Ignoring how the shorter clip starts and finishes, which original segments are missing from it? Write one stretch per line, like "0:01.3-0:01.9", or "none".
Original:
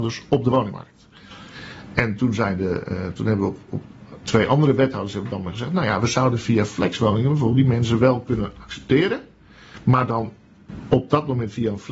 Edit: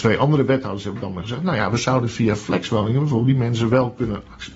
none